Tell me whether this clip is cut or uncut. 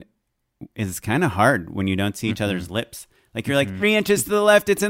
cut